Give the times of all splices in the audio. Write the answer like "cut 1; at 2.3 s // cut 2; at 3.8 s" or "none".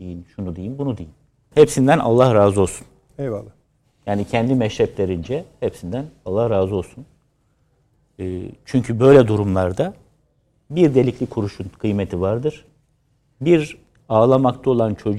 cut 1; at 1.5 s